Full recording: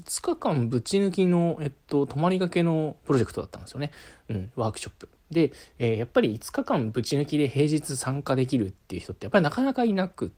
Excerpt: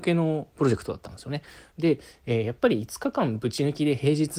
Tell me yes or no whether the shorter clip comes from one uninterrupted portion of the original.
no